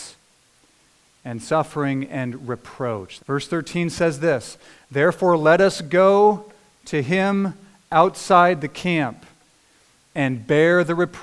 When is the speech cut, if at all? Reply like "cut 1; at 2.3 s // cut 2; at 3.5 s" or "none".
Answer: cut 1; at 3.2 s